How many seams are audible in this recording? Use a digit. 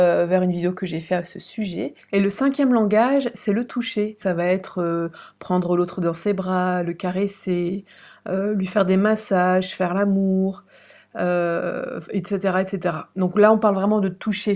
0